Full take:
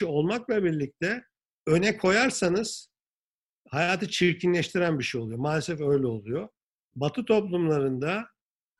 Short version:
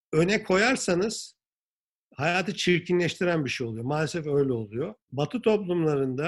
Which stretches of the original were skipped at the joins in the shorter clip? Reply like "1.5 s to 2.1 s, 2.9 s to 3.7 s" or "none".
6.6 s to 6.8 s

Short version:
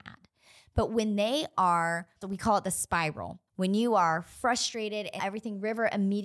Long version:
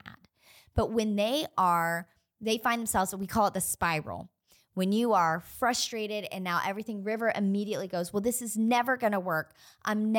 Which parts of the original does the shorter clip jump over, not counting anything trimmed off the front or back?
2.2 s to 3.1 s, 4.4 s to 4.7 s, 6.4 s to 6.6 s

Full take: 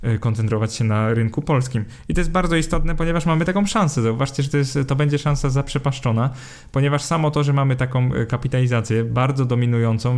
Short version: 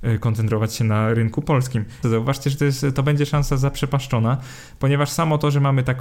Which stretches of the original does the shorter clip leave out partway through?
2.0 s to 4.0 s

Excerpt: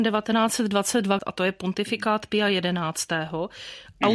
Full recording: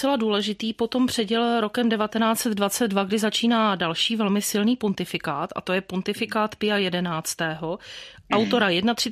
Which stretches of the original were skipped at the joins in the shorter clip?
3.1 s to 5.5 s

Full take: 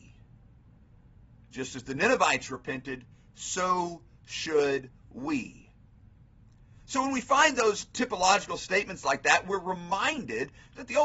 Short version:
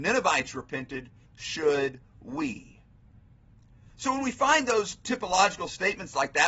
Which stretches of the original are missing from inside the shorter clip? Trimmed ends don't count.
3.2 s to 4.1 s

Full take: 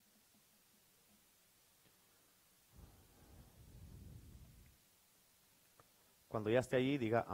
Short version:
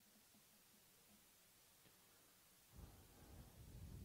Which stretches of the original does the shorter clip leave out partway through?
none

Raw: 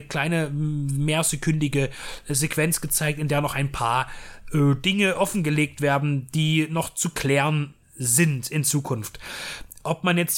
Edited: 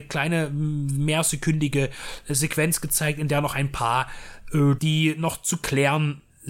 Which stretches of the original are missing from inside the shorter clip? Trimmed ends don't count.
4.8 s to 6.3 s

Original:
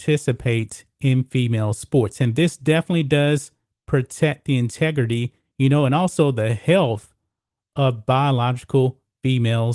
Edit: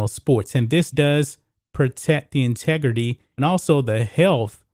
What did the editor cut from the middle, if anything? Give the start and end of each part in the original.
2.6 s to 3.1 s, 5.5 s to 5.9 s

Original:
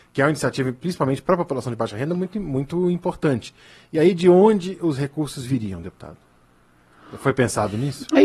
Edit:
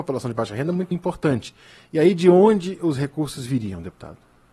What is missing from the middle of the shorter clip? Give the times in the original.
2.3 s to 2.9 s

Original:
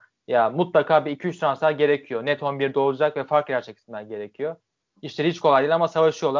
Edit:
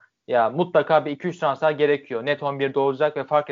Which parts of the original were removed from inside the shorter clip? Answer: none

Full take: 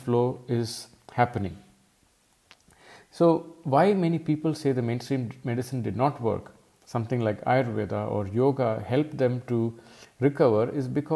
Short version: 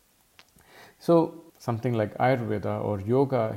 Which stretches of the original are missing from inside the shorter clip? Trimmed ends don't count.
3.6 s to 6.8 s

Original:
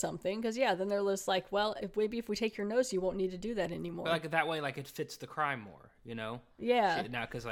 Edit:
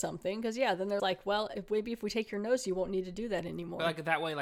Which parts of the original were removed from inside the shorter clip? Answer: 1.0 s to 1.3 s

